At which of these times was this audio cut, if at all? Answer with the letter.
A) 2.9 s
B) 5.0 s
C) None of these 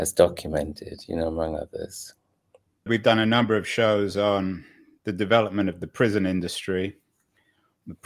A